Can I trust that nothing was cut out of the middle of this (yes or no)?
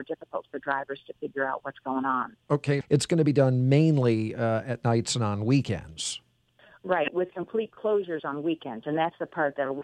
no